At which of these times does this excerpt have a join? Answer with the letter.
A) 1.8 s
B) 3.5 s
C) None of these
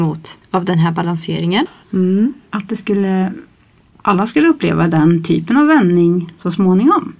A